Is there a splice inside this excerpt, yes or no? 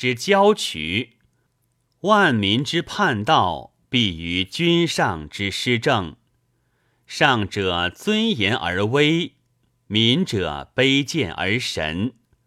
no